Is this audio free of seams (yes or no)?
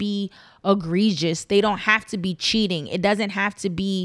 yes